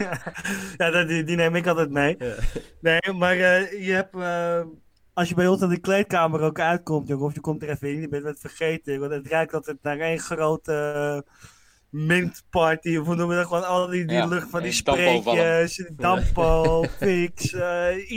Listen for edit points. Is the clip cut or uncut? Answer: uncut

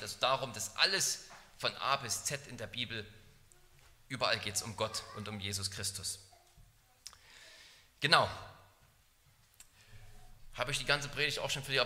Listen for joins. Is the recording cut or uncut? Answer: uncut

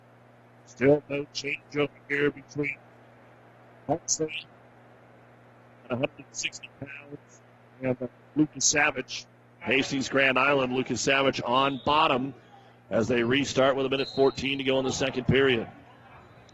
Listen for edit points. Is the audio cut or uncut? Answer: uncut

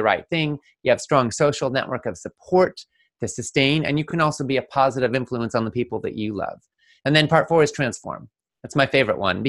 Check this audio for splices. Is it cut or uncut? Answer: uncut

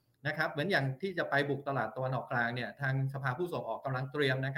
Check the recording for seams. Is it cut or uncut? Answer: uncut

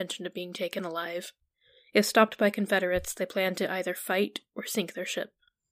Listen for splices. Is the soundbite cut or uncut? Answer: uncut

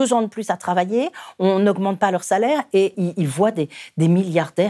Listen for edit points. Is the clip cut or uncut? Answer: cut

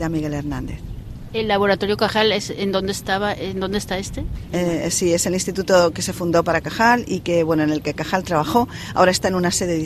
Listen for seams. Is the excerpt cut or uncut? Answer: cut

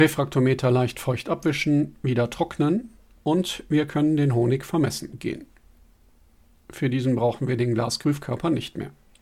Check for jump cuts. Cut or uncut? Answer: uncut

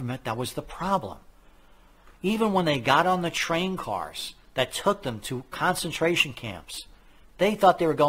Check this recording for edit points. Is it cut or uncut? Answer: uncut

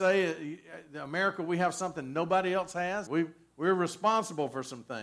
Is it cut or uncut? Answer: cut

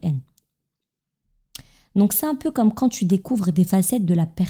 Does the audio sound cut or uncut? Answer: uncut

